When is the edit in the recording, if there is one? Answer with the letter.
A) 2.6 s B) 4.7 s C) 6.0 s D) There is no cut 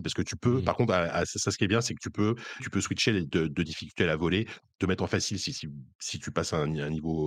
A